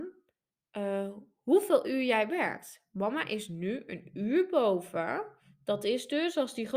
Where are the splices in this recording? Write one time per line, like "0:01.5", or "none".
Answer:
none